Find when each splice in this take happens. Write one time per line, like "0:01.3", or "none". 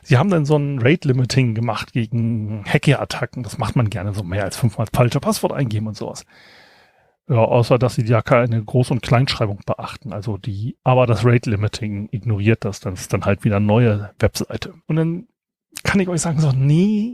0:10.8
0:14.8